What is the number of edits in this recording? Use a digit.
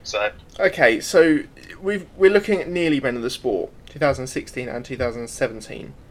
1